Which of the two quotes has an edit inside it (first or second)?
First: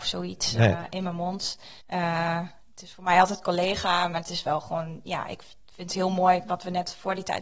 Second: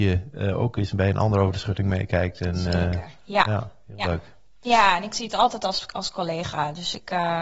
first